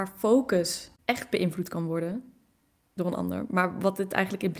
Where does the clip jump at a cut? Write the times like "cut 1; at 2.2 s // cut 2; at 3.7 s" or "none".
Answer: none